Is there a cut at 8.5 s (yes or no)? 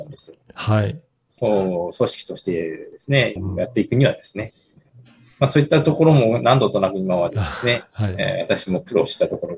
no